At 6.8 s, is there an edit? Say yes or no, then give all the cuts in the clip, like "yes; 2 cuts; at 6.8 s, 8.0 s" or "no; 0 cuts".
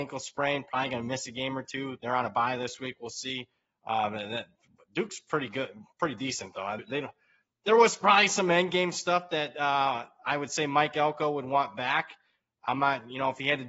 yes; 1 cut; at 6.8 s